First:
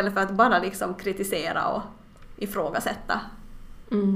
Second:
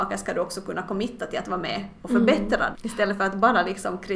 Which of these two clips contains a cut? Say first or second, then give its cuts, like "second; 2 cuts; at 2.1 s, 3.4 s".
second; 1 cut; at 2.7 s